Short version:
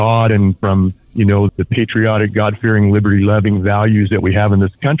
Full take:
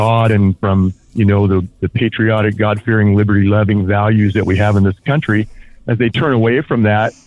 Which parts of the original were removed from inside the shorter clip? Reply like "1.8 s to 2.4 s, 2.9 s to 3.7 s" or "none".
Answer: 1.5 s to 1.7 s